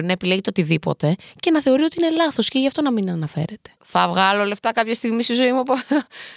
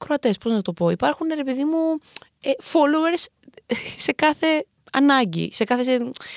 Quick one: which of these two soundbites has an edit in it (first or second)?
first